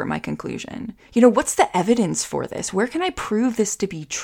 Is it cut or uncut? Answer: cut